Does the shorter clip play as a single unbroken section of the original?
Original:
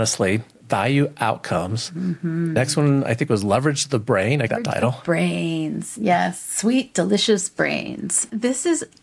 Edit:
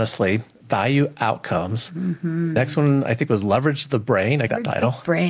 yes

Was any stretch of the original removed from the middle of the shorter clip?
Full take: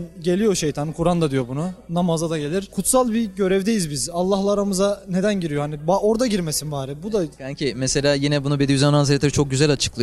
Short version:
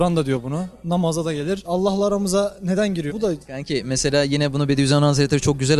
yes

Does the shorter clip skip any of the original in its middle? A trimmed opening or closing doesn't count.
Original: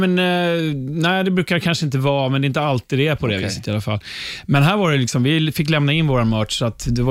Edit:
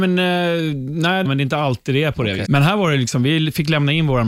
yes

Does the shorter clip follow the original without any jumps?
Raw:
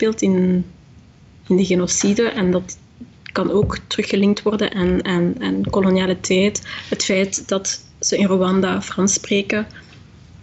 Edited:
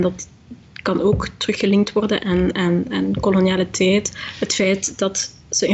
yes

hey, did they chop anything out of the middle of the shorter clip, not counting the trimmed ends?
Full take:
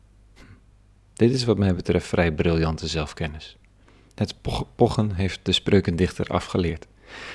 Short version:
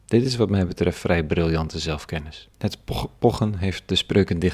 yes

